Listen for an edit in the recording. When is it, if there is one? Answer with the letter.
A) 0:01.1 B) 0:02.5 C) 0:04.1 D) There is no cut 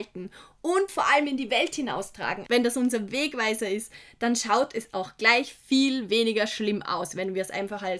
B